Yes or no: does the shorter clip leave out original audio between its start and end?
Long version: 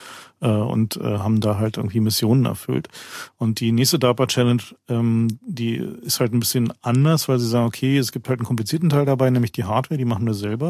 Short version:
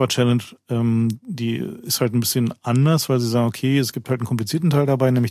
no